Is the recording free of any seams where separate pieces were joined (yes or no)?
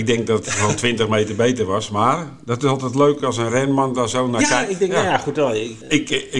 no